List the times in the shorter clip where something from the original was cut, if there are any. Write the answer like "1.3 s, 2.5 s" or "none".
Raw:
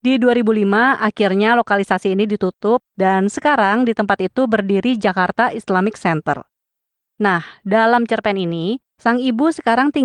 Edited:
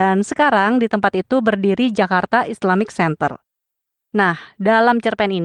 none